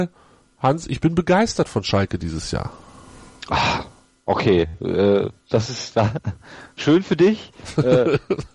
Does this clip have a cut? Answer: no; 0 cuts

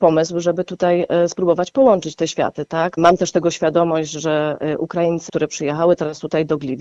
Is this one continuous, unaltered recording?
no; 2 cuts; at 3.0 s, 5.3 s

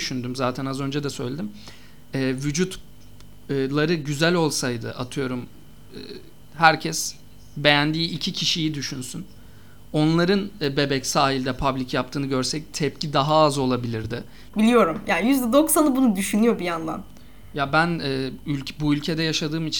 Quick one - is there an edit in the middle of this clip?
yes; 1 cut; at 14.5 s

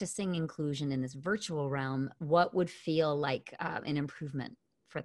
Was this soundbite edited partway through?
no; 0 cuts

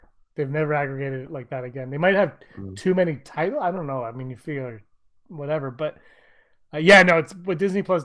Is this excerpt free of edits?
yes; 0 cuts

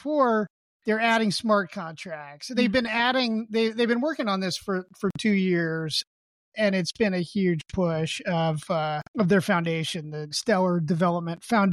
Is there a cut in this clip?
yes; 2 cuts; at 9.1 s, 10.3 s

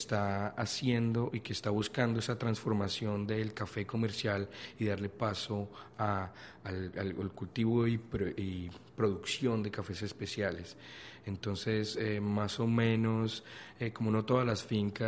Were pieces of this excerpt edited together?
no; 0 cuts

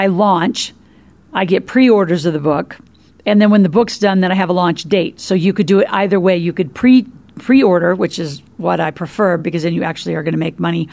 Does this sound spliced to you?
no; 0 cuts

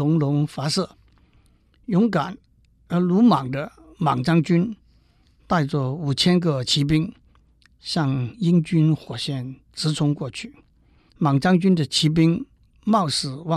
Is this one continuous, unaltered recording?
no; 1 cut; at 11.1 s

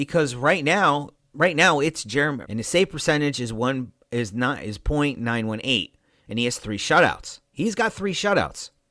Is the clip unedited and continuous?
no; 2 cuts; at 1.1 s, 2.4 s

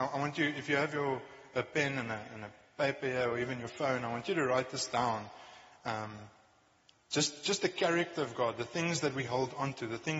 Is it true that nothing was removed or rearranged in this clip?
yes; 0 cuts

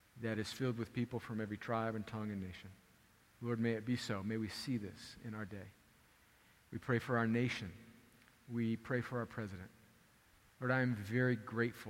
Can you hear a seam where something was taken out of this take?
no; 0 cuts

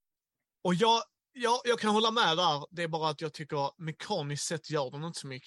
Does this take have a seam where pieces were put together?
no; 0 cuts

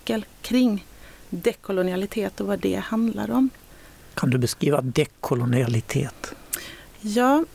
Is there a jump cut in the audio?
no; 0 cuts

